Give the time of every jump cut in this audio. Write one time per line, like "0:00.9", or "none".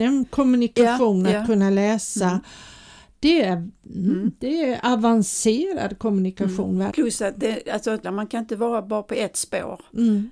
0:06.9
0:08.0